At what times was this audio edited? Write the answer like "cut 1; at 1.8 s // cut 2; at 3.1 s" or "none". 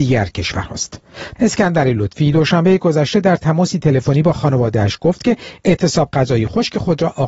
cut 1; at 1.4 s